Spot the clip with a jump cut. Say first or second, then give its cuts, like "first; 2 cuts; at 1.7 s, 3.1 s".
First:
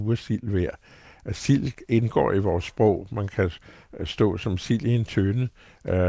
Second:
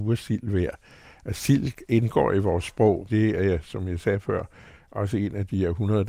second; 1 cut; at 3.1 s